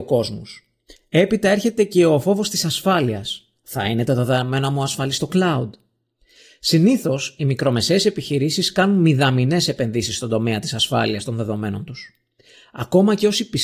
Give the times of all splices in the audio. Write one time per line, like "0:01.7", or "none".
none